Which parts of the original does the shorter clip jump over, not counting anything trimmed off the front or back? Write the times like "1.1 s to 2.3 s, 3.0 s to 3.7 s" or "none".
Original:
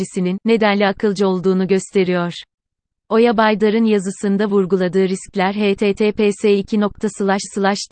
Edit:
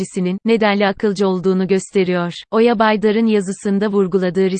2.5 s to 3.0 s